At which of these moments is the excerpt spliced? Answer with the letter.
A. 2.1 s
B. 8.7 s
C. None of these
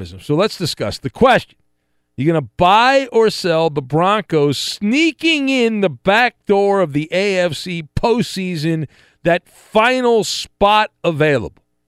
C